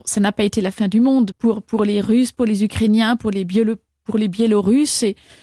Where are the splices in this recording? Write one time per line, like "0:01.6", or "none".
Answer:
0:01.3